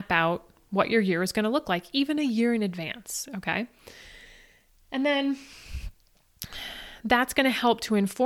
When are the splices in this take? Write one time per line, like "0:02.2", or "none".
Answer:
none